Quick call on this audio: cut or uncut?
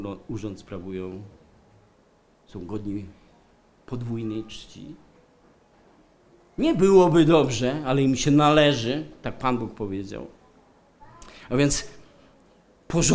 uncut